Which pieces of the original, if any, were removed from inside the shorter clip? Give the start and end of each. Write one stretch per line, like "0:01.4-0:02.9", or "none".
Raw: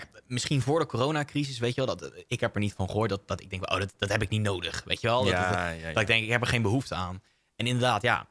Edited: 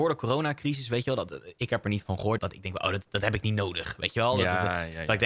0:03.1-0:03.3